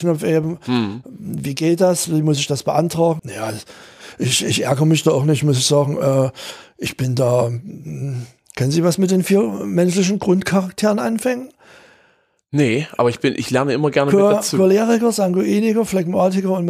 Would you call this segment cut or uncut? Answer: cut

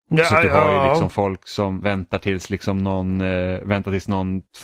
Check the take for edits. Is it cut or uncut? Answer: cut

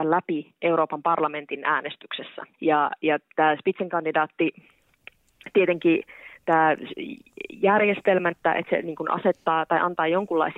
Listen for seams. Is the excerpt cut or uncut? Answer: cut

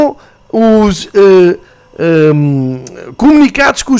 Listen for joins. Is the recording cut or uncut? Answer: uncut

